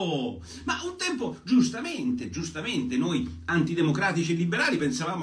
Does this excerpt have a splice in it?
no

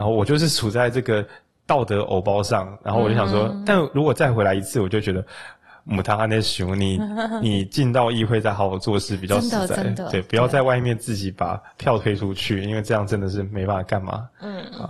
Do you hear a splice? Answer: no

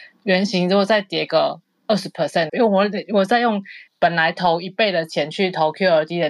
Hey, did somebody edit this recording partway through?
yes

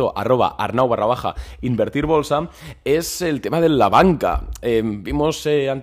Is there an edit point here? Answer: no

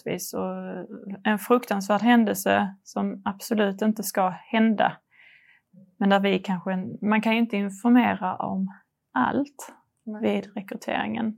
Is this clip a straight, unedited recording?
yes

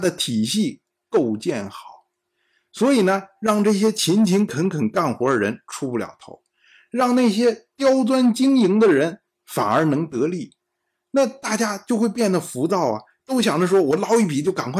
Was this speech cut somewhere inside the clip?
no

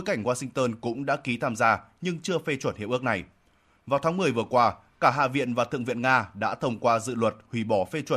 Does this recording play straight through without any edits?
yes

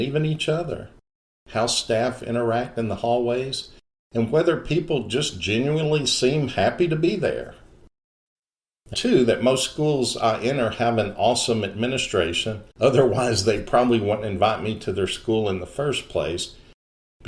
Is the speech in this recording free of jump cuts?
no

